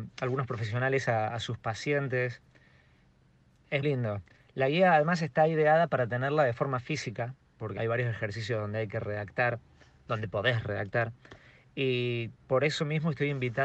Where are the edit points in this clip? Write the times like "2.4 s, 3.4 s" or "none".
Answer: 3.8 s, 7.8 s